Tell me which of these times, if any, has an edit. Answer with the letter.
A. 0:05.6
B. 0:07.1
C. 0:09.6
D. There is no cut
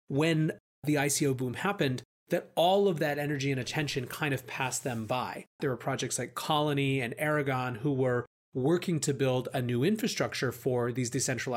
A